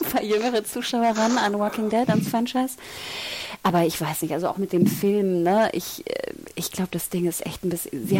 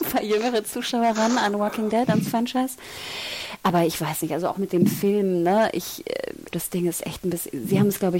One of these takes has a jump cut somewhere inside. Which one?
second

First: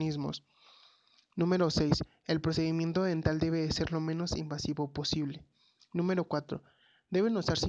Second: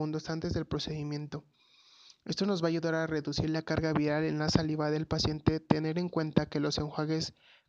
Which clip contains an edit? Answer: first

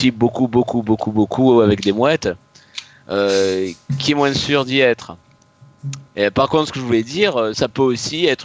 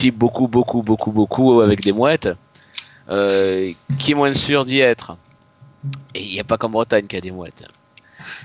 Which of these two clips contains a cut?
first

